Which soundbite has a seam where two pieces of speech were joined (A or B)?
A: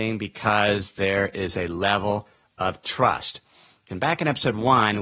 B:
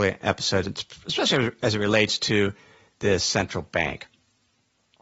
A